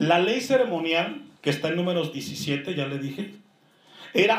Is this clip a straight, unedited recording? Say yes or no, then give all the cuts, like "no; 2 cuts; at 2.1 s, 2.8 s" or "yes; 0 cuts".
yes; 0 cuts